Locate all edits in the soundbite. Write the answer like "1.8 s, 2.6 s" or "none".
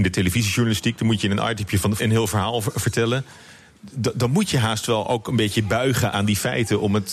2.0 s, 6.1 s